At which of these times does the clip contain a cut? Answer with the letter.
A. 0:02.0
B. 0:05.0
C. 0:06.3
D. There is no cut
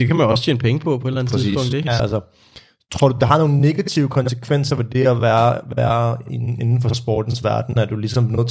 A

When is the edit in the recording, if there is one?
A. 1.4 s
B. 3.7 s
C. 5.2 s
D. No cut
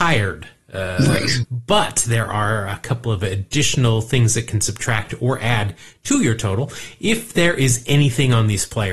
A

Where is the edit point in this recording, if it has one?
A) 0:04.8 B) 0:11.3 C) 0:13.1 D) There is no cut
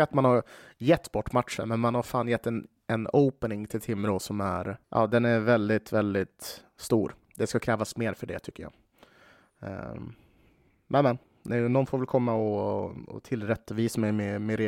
A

